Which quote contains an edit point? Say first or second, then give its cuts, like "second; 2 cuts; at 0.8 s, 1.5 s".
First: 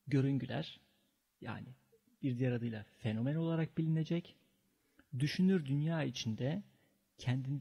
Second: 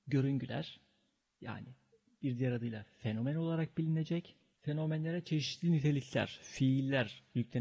second; 1 cut; at 4.5 s